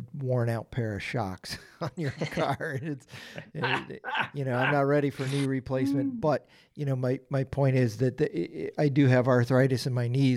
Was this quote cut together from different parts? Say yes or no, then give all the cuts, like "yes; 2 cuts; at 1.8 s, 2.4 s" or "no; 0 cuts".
no; 0 cuts